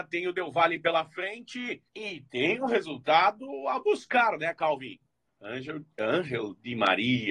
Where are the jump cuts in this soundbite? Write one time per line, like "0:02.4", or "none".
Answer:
0:01.9
0:05.3

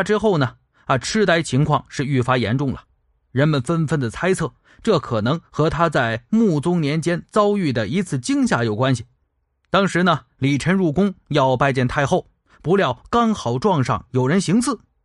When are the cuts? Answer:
none

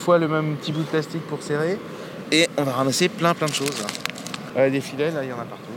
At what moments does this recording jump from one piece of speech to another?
0:02.2
0:04.5

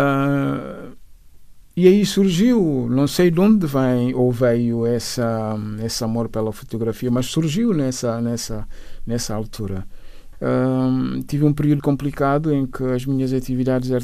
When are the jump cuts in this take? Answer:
0:10.3
0:11.8

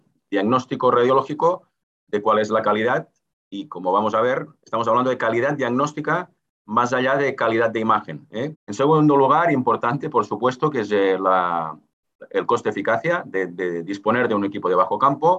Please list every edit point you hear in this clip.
0:08.5

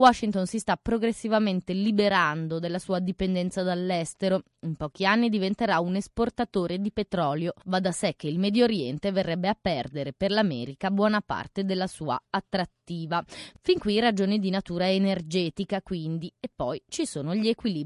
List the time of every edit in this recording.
none

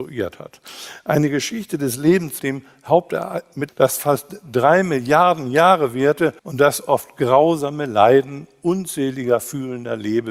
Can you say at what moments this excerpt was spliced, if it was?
0:02.4
0:03.7
0:06.4

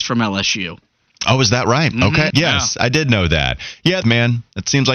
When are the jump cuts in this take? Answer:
0:02.3
0:04.0

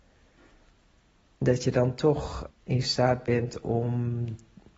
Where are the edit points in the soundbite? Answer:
0:02.5

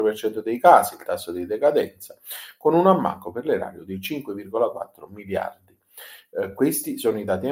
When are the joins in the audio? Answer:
none

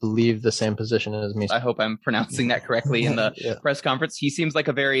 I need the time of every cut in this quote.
0:01.5

